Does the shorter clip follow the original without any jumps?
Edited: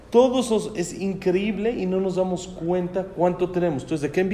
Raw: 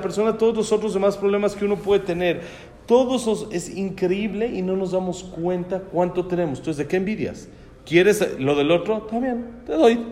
yes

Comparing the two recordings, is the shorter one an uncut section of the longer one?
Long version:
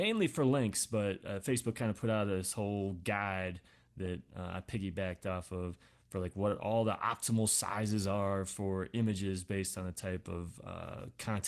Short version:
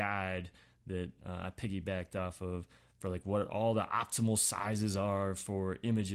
yes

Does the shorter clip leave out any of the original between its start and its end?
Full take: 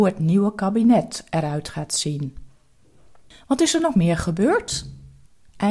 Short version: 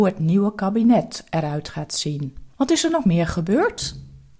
yes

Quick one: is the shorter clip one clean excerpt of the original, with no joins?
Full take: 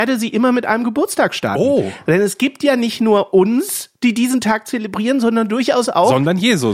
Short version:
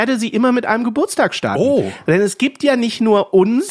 yes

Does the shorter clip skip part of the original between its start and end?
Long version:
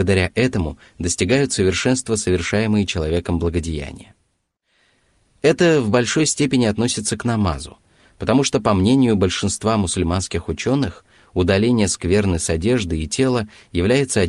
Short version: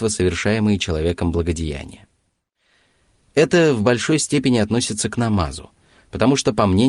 no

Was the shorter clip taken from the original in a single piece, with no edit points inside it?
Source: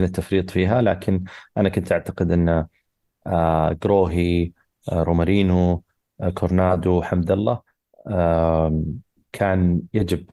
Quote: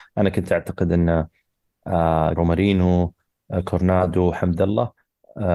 no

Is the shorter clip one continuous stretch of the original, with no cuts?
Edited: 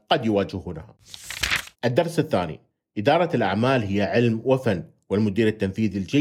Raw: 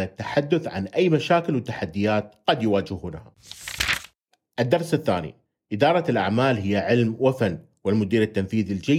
no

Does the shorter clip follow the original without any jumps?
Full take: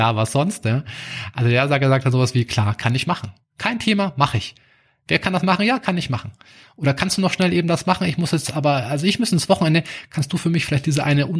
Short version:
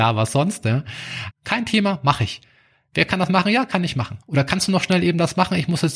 no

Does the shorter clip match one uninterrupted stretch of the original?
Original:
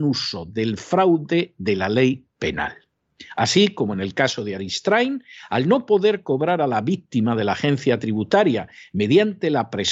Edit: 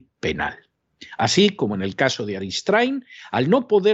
yes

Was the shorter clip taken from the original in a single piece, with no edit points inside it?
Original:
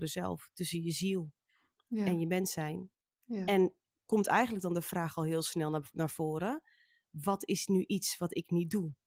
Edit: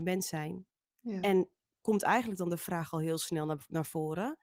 yes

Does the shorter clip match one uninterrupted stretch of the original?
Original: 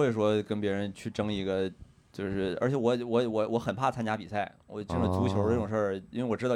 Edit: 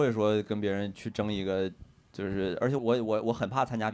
no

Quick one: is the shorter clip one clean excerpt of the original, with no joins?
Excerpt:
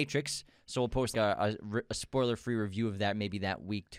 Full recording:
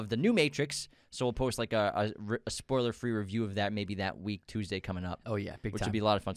no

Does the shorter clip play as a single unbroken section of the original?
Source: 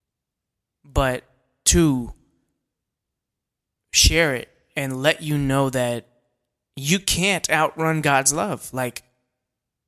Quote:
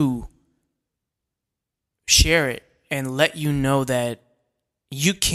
yes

